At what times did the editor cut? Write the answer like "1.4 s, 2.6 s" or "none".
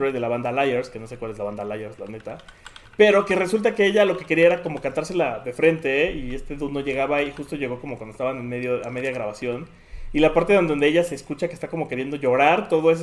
none